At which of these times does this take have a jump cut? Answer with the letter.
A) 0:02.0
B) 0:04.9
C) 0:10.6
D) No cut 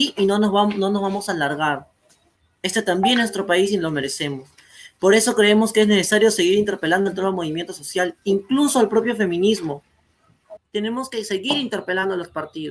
C